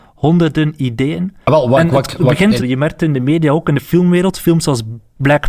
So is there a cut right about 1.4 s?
no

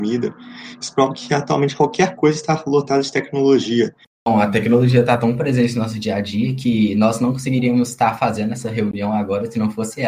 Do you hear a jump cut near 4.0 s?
yes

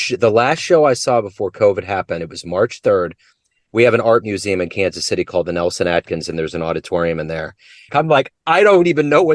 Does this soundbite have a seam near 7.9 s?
yes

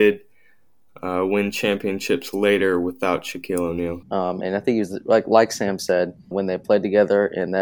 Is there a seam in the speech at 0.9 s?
no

